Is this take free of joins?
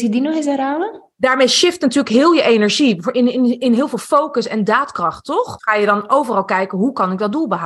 no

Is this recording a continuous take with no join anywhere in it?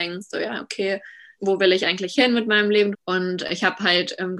no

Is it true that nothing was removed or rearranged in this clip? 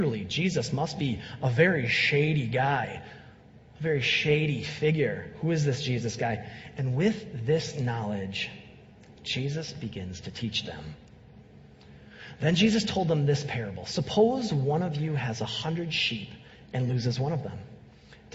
yes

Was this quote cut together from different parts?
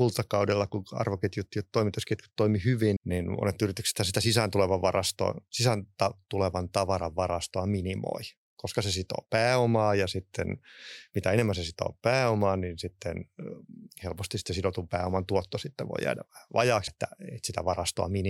yes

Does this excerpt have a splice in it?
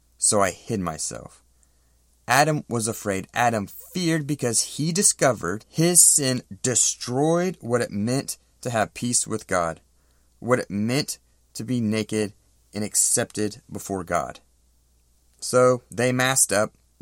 no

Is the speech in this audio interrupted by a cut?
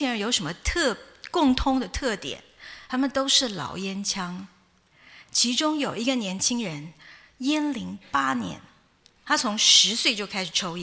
no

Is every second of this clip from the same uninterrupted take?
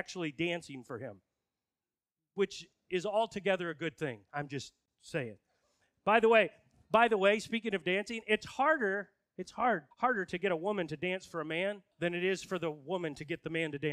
no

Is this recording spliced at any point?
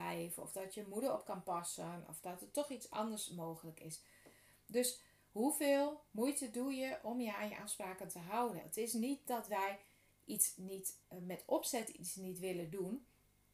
yes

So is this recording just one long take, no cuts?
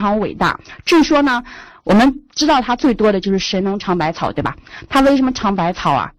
yes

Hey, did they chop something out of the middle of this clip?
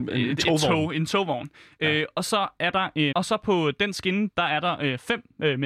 yes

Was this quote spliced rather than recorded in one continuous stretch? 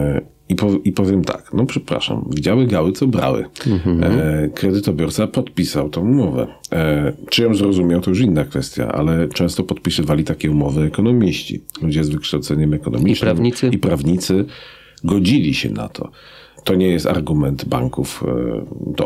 no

